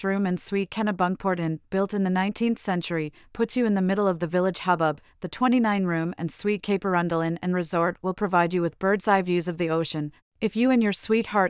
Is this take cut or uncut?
cut